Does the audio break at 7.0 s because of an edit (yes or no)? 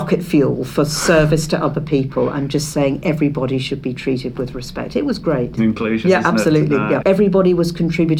yes